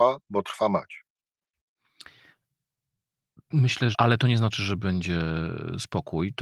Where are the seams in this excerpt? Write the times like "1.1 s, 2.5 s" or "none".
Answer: 3.9 s